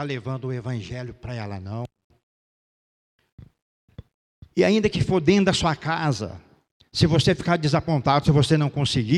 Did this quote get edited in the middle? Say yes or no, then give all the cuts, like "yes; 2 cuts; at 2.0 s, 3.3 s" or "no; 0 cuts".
no; 0 cuts